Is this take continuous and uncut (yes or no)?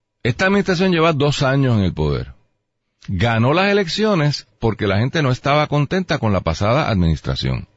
yes